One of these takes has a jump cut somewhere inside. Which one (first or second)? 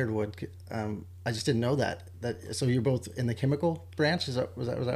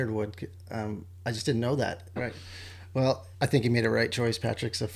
second